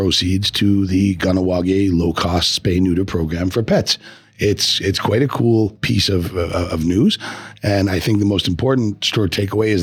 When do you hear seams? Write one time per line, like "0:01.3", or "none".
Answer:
none